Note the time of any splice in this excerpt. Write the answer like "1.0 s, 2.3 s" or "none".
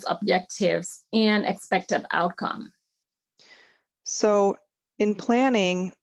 3.9 s